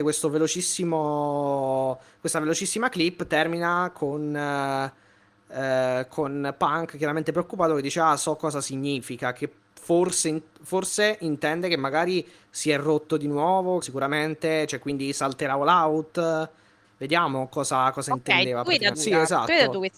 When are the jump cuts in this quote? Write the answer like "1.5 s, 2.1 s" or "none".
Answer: 13.8 s, 18.9 s